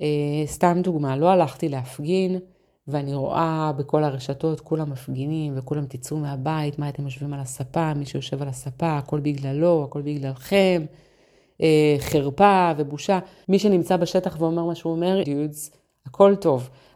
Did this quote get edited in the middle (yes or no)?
yes